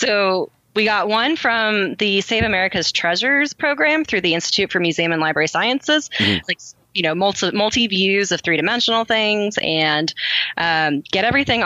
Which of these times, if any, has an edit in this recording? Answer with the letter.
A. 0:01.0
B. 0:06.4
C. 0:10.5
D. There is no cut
B